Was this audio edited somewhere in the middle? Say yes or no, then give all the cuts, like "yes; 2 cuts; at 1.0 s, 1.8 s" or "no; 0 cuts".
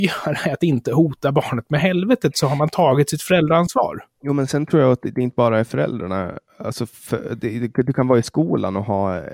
no; 0 cuts